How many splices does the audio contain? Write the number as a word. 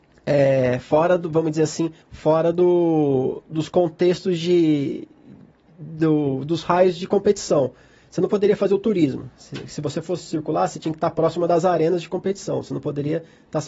one